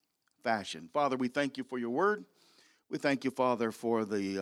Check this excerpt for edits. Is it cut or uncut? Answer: uncut